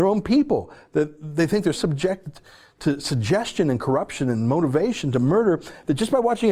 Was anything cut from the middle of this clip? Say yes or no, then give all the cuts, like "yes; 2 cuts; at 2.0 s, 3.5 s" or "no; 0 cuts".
yes; 1 cut; at 1.7 s